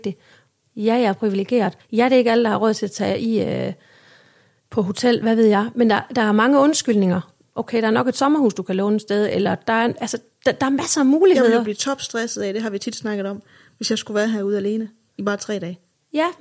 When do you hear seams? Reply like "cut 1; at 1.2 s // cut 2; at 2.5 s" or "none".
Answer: cut 1; at 1.8 s // cut 2; at 7.4 s